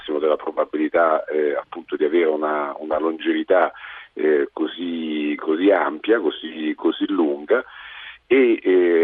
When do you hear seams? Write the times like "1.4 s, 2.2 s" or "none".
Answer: none

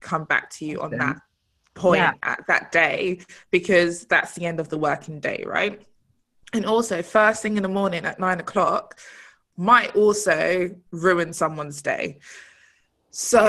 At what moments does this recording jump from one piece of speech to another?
none

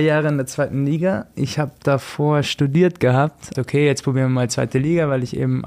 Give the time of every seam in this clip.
3.5 s

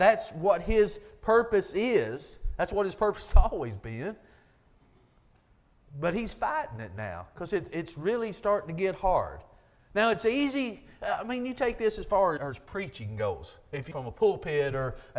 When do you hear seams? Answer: 12.4 s, 13.9 s

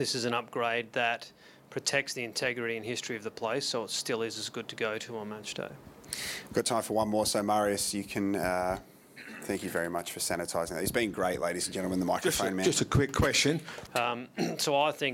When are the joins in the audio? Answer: 13.9 s

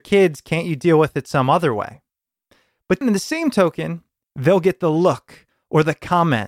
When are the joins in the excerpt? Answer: 3.0 s, 4.2 s

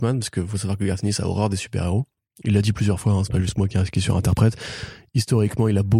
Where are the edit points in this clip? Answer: none

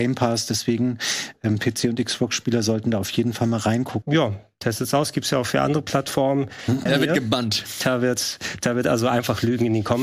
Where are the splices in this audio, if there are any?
4.0 s, 6.9 s

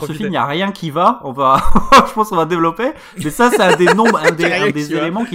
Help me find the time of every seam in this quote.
none

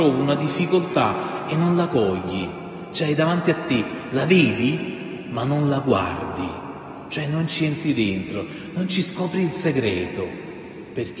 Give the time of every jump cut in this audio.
none

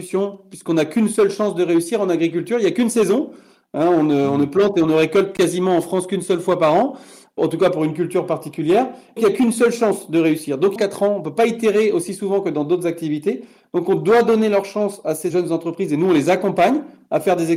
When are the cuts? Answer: 9.2 s, 10.8 s

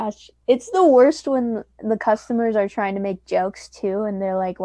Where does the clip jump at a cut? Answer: none

